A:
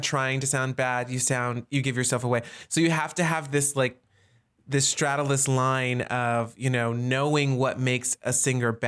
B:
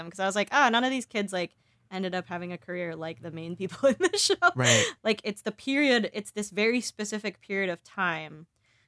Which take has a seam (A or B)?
B